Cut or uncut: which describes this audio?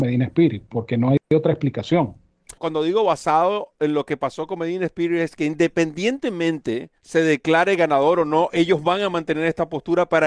cut